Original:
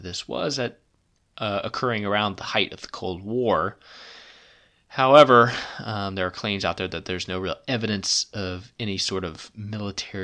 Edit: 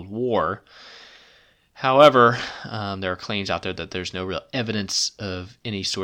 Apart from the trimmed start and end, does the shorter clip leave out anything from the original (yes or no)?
no